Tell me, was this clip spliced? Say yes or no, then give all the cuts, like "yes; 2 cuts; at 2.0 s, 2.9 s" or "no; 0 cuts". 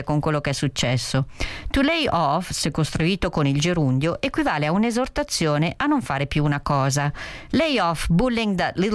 no; 0 cuts